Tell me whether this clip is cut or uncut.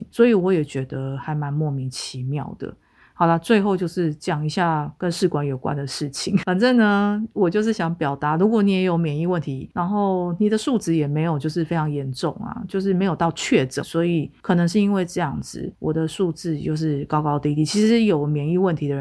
cut